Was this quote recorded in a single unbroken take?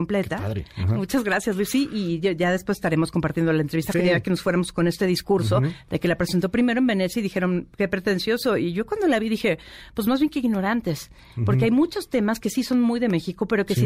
no; 1 cut; at 3.9 s

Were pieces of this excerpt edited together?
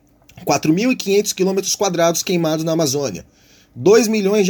no; 0 cuts

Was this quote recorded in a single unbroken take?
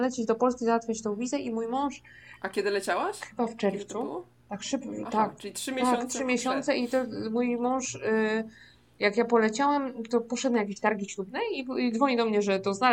yes; 0 cuts

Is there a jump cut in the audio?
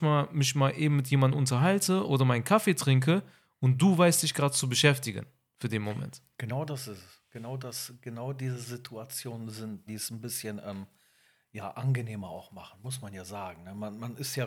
yes; 1 cut; at 9.9 s

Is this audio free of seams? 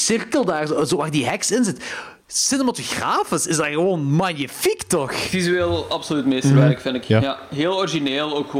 yes; 0 cuts

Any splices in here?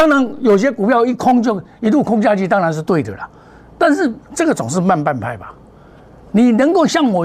no; 0 cuts

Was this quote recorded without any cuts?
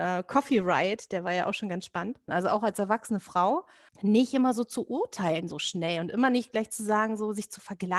no; 2 cuts; at 2.3 s, 3.9 s

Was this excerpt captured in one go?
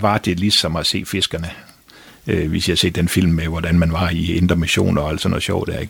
yes; 0 cuts

